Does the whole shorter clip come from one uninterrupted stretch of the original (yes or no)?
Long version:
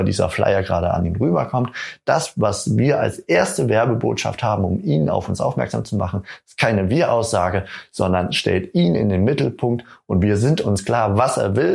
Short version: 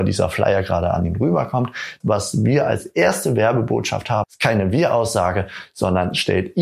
no